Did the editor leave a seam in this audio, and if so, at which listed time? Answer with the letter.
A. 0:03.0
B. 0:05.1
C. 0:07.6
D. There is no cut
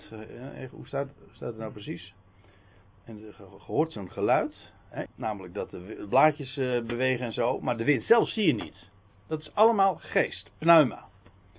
B